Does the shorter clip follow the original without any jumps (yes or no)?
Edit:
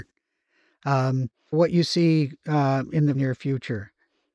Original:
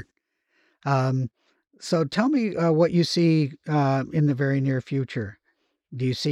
no